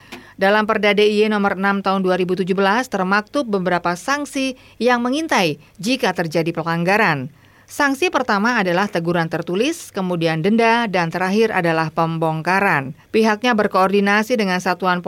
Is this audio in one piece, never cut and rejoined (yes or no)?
no